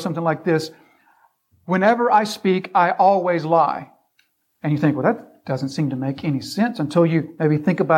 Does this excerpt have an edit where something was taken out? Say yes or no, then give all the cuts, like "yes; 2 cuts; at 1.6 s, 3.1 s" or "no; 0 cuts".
no; 0 cuts